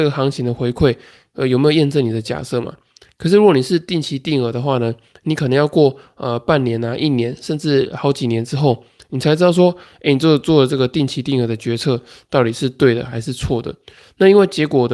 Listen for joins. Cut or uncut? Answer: uncut